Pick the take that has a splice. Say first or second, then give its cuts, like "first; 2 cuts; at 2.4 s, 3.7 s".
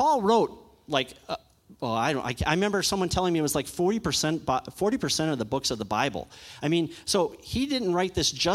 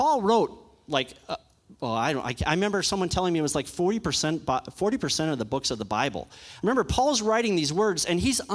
second; 1 cut; at 6.6 s